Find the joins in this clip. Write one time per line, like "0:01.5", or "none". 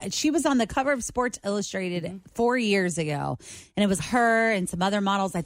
0:04.0